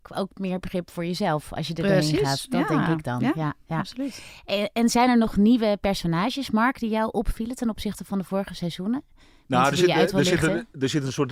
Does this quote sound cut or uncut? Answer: uncut